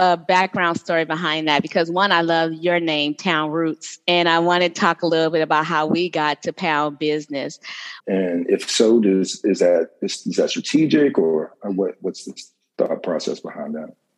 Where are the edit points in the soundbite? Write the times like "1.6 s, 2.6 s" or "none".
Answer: 8.0 s